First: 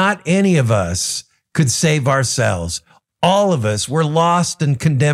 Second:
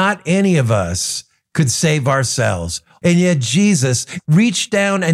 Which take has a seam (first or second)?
second